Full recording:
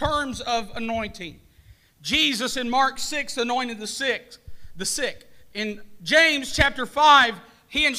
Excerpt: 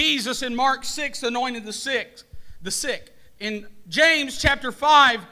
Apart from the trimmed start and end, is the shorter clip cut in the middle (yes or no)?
no